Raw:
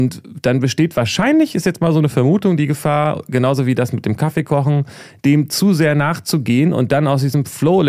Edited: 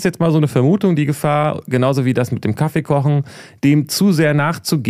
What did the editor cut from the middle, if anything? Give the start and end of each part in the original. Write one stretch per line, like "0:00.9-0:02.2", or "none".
none